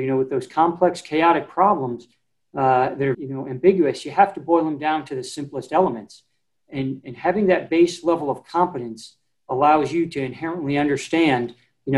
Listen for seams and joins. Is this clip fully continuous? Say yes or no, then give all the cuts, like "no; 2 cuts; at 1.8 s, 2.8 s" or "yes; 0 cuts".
no; 1 cut; at 3.1 s